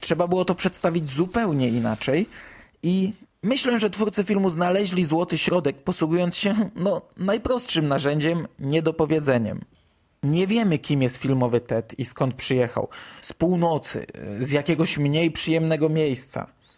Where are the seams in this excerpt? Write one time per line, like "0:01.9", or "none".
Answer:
0:13.2